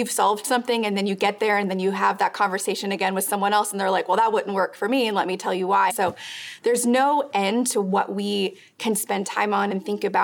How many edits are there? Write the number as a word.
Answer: one